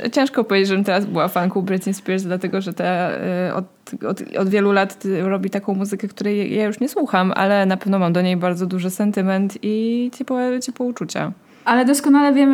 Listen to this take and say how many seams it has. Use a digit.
0